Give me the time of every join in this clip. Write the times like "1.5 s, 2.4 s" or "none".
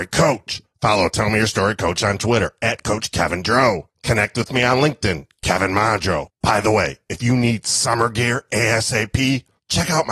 none

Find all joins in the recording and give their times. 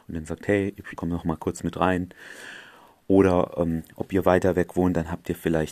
1.0 s

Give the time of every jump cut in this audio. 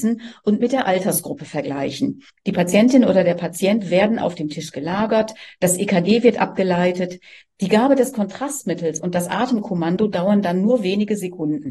2.3 s

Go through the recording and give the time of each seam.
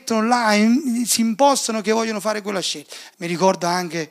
3.1 s

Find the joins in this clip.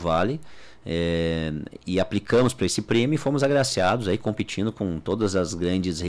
1.8 s

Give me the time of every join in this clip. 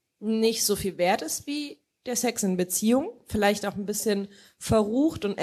none

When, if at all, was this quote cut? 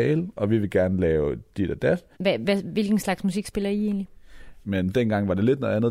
2.1 s, 4.6 s

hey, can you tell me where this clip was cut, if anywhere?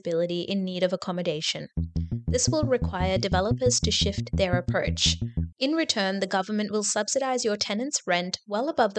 5.5 s

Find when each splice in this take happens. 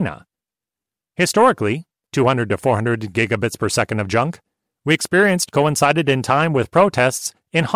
2.1 s

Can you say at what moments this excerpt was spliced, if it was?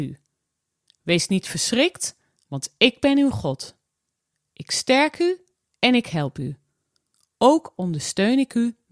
none

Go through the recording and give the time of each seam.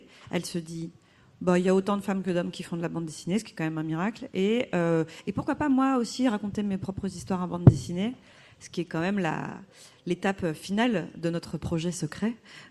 none

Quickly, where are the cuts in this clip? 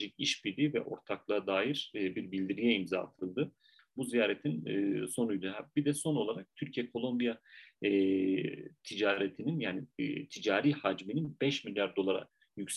3.8 s

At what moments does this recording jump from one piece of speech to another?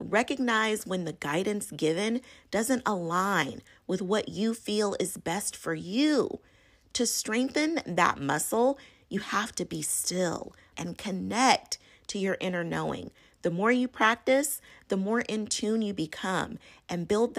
10.7 s

